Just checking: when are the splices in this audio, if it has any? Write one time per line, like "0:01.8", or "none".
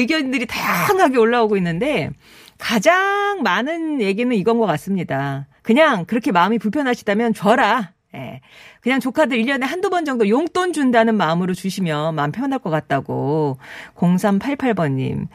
0:05.6